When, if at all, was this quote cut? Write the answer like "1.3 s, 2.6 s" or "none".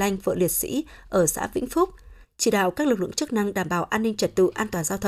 2.2 s